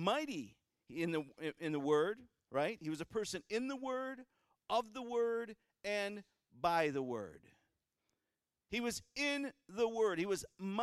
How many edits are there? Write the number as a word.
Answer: zero